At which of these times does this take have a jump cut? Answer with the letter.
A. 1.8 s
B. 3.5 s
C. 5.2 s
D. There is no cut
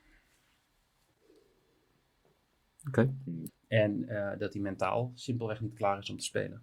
B